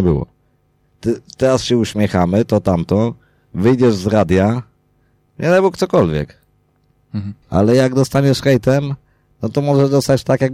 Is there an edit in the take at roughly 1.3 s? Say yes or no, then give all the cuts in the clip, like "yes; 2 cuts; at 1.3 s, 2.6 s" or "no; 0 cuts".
no; 2 cuts; at 5.3 s, 7.4 s